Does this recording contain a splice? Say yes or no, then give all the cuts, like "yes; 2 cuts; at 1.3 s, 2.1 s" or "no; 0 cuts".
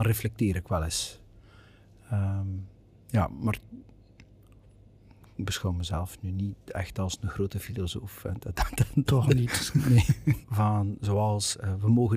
yes; 1 cut; at 10.4 s